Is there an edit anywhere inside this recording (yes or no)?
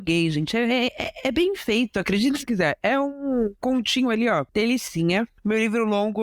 no